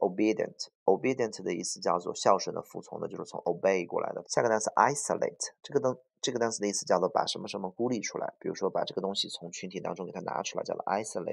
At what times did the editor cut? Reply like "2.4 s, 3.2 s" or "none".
4.2 s